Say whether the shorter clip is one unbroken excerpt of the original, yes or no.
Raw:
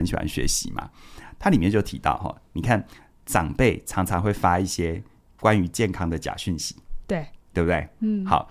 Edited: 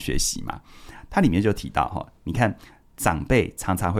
yes